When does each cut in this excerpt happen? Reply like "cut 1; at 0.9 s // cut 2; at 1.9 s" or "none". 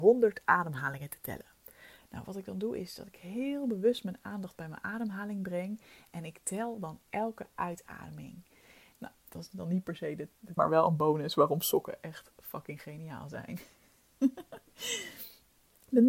cut 1; at 8.9 s // cut 2; at 10.6 s